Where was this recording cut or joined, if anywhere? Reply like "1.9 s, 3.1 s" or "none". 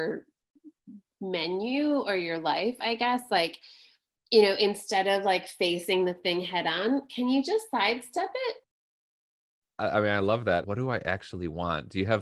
10.6 s